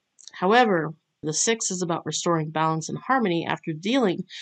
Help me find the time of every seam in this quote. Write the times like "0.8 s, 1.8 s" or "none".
1.2 s